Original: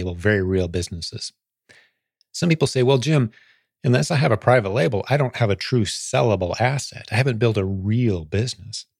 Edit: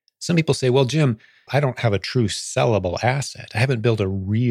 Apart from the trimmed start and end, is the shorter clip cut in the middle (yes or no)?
yes